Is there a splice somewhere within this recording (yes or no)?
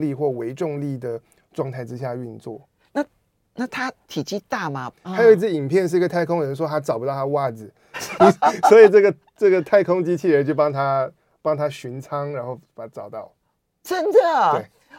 yes